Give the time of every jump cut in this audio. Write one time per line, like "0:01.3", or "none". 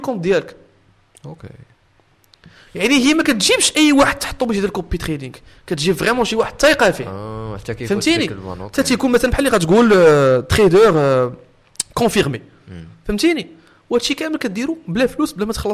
none